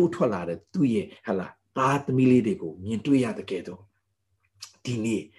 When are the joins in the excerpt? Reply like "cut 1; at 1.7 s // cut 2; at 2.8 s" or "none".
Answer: cut 1; at 1.2 s